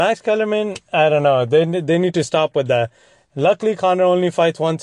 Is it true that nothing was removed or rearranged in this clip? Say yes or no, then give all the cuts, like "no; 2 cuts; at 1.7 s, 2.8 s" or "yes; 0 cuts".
yes; 0 cuts